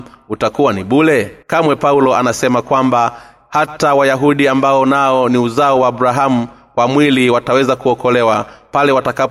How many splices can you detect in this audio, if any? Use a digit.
1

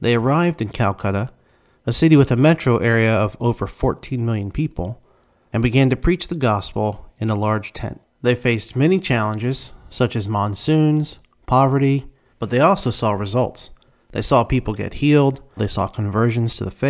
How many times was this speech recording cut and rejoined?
2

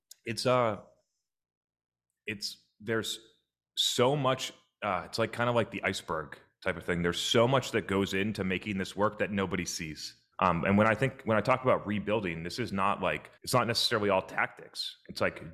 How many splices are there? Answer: 2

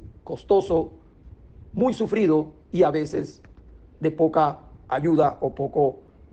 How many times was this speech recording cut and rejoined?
0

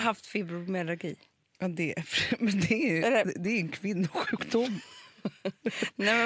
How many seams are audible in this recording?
0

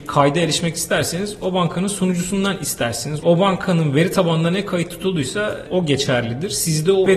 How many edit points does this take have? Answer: 1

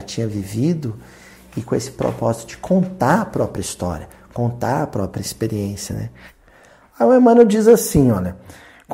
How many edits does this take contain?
0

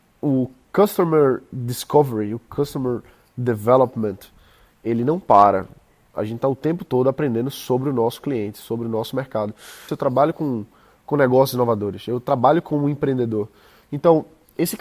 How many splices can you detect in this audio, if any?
2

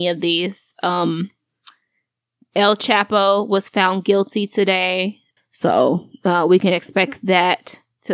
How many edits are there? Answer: 1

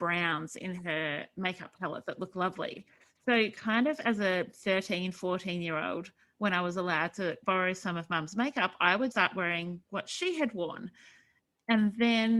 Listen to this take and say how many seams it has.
2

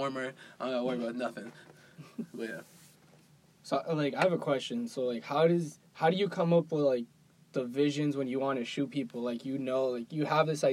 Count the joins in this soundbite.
0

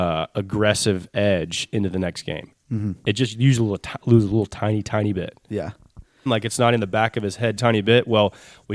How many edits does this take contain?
2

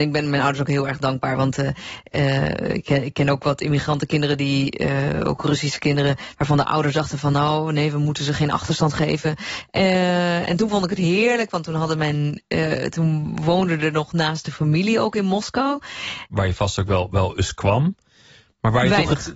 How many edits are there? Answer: 2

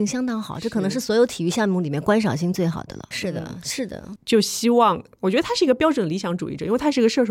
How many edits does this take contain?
2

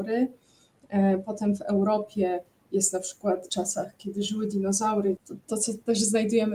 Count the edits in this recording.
2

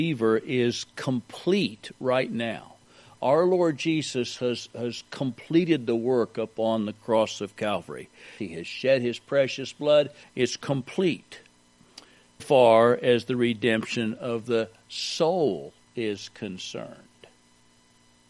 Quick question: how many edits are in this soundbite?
3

